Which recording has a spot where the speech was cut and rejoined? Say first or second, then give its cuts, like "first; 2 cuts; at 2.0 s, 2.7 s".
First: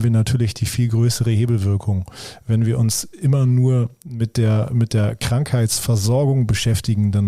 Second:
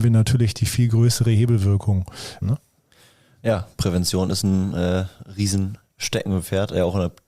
second; 1 cut; at 2.4 s